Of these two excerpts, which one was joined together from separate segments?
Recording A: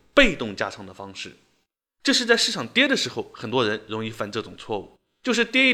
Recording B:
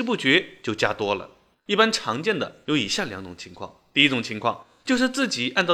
B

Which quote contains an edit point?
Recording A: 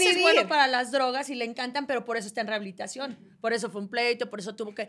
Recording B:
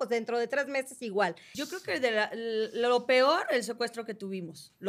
B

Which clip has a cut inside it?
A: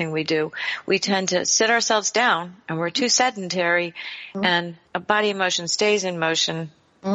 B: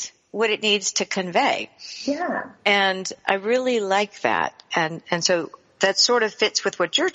A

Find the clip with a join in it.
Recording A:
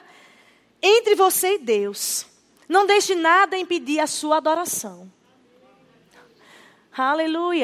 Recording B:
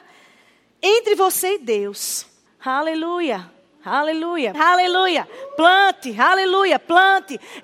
B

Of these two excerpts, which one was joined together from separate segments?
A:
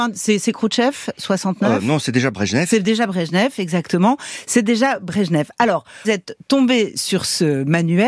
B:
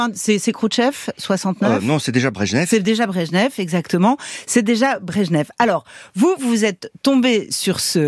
A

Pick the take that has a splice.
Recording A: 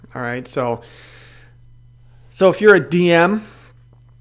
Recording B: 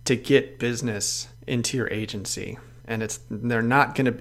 B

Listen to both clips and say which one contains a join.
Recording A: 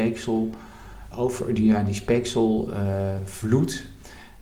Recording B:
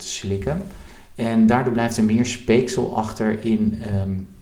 A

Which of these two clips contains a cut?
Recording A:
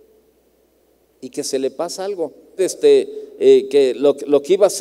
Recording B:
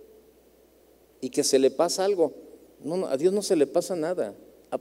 A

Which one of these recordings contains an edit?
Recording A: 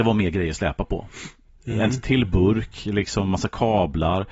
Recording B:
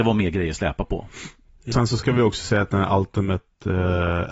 B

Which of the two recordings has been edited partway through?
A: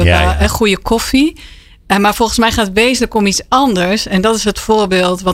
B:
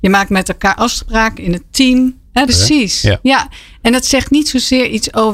B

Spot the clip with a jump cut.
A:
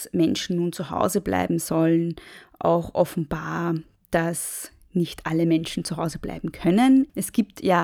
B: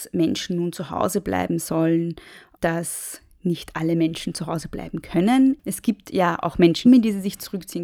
B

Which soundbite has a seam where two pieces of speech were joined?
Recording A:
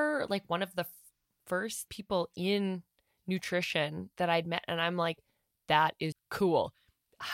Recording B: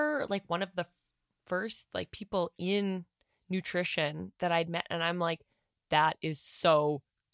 A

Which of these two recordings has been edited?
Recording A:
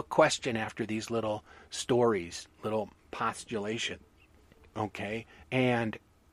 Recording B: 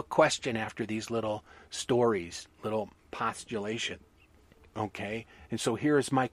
A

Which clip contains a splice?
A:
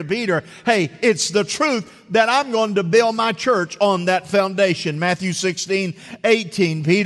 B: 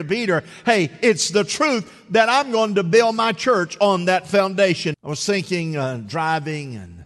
B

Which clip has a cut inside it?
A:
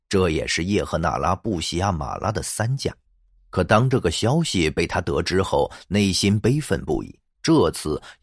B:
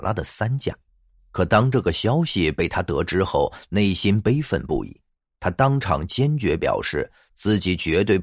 A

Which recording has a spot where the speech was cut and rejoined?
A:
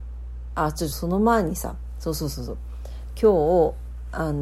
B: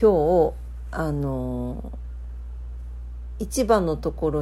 A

